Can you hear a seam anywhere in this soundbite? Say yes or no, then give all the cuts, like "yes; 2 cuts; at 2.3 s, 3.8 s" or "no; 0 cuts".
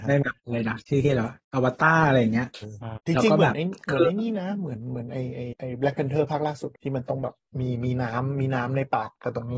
yes; 1 cut; at 2.6 s